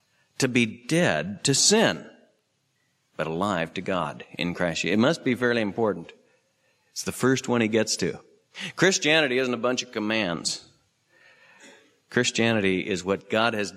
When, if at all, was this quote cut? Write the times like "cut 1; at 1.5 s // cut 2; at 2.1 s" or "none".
none